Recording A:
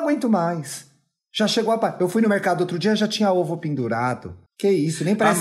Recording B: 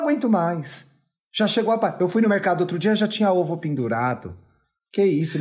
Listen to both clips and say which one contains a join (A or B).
A